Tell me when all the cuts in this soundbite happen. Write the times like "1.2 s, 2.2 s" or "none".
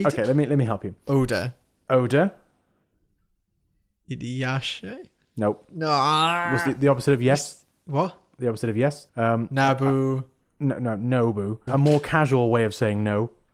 9.1 s, 11.7 s